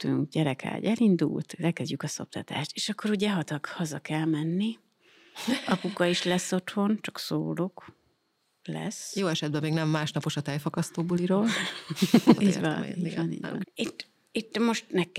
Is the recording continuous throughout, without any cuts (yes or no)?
no